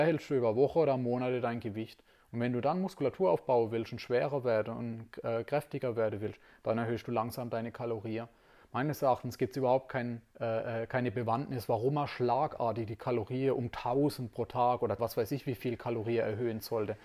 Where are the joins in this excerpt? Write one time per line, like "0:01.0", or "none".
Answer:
0:10.3
0:15.0